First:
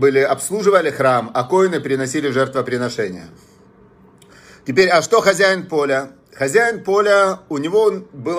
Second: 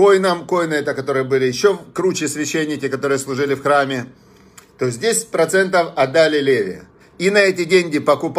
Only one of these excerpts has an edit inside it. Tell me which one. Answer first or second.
second